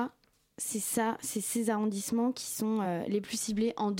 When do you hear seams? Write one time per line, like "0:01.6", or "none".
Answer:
none